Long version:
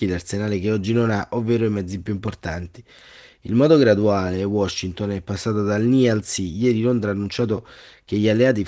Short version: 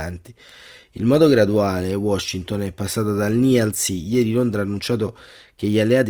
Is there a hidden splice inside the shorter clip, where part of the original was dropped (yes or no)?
no